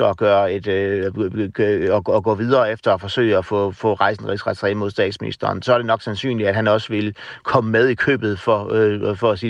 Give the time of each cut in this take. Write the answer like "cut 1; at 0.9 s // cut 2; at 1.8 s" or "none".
none